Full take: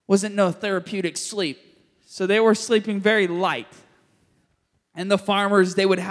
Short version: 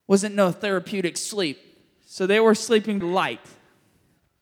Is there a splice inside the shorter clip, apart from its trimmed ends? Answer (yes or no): yes